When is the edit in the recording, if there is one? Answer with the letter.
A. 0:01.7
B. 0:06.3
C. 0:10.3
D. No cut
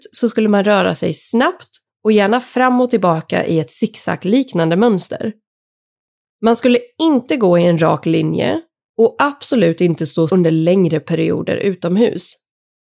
C